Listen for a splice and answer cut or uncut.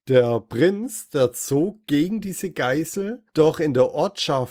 uncut